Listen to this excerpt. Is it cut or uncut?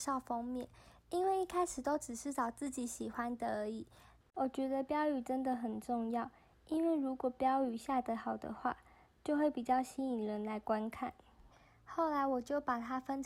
cut